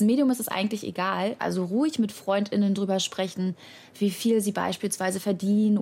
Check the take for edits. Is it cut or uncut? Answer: cut